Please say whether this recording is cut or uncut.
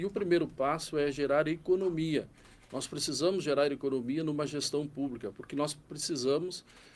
uncut